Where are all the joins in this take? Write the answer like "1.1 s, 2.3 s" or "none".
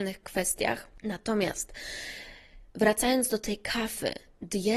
2.7 s